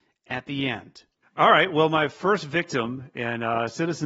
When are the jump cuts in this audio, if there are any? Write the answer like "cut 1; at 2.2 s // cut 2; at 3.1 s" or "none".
cut 1; at 1.2 s